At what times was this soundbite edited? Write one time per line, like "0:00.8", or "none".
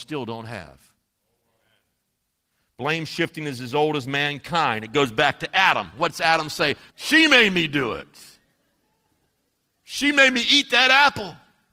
0:06.9